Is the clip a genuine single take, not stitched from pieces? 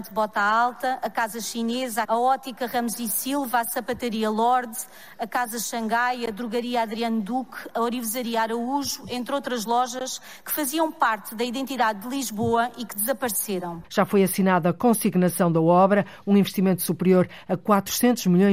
no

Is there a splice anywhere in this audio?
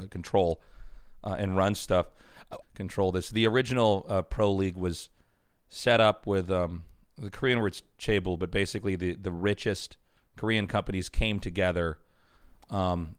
yes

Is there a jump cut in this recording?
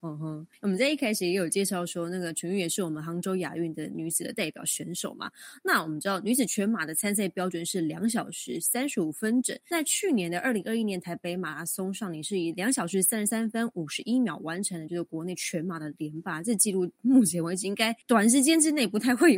no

